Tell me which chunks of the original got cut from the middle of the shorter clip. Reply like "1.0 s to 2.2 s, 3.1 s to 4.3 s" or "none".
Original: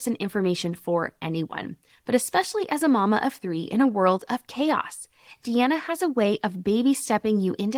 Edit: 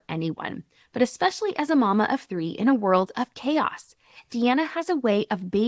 none